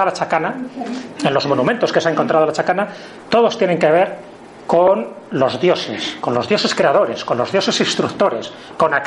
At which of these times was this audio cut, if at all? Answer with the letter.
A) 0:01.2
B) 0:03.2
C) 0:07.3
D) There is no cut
D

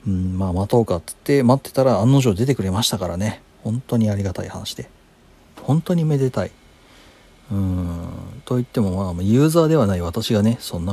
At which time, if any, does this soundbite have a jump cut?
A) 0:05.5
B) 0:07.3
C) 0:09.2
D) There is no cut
A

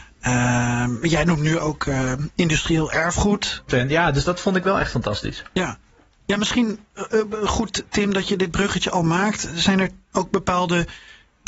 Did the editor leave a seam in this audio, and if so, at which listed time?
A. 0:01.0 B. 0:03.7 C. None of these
B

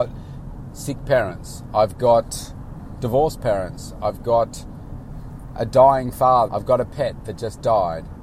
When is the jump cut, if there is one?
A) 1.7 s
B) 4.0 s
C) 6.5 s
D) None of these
C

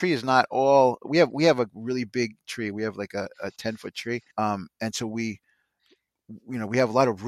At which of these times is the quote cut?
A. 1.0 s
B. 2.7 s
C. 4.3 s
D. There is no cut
C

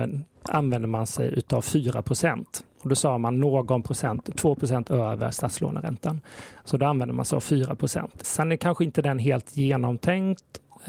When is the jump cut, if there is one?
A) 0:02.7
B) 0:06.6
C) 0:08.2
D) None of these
C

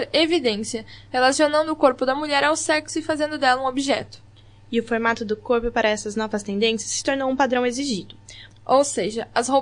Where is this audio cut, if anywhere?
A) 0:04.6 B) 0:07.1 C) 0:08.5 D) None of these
C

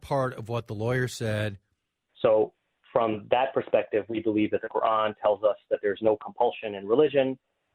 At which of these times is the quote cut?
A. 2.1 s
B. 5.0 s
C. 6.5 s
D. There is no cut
A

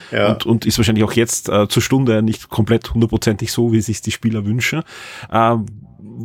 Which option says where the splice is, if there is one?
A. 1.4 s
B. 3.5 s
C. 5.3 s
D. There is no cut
C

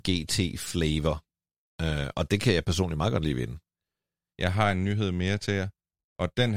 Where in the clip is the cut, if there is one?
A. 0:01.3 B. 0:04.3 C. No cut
B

